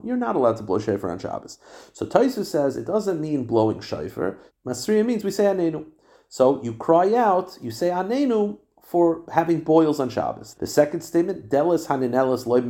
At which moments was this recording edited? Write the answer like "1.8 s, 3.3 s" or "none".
4.5 s, 10.5 s